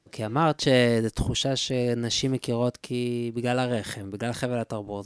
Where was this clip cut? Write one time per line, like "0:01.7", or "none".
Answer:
none